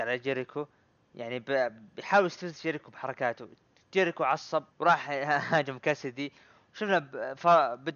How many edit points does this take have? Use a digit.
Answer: 1